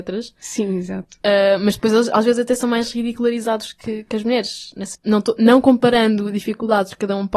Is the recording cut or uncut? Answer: cut